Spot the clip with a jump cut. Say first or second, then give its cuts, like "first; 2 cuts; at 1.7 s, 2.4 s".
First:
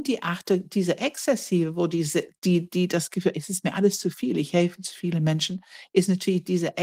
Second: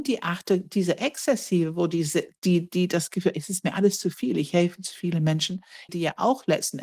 second; 1 cut; at 5.9 s